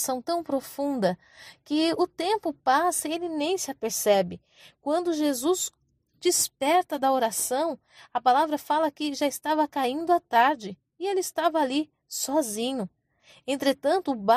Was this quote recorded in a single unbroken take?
yes; 0 cuts

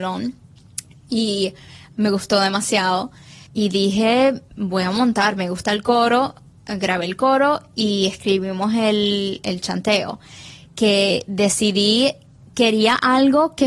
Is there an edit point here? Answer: yes; 1 cut; at 3.4 s

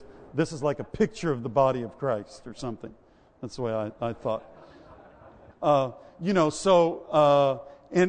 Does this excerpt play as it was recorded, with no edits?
no; 1 cut; at 5.5 s

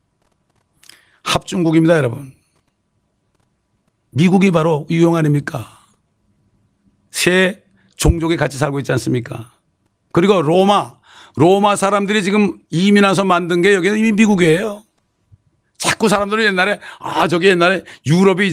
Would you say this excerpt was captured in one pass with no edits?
yes; 0 cuts

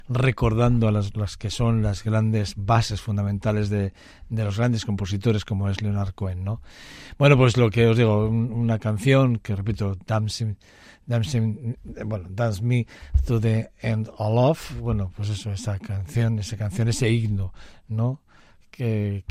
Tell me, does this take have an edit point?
no; 0 cuts

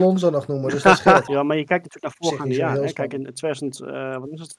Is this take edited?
yes; 1 cut; at 1.3 s

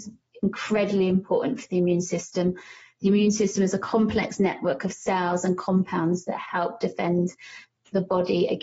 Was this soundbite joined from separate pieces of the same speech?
no; 0 cuts

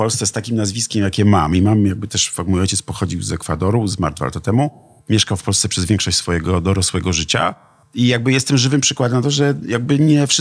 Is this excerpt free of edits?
yes; 0 cuts

